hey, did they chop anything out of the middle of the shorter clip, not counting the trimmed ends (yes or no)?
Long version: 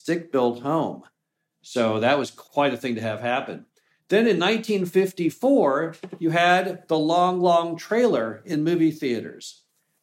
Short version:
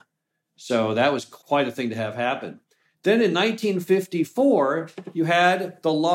no